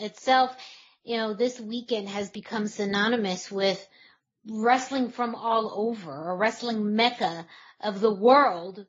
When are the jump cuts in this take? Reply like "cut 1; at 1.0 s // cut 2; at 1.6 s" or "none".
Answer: none